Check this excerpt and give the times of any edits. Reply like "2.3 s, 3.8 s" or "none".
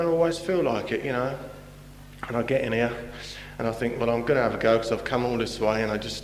none